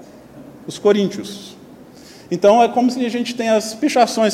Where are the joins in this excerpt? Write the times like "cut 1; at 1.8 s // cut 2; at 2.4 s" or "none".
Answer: none